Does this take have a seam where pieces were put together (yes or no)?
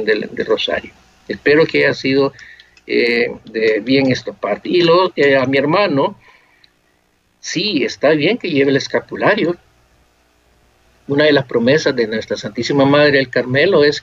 no